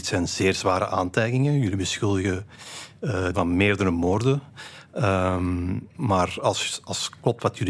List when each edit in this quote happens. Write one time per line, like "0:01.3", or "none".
0:03.3